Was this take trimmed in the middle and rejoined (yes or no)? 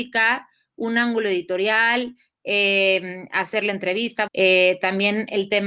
yes